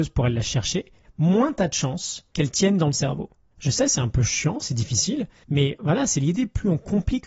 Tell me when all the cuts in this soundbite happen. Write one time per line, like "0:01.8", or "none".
0:03.5